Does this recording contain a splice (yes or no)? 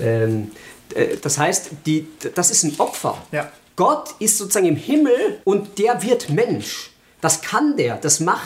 yes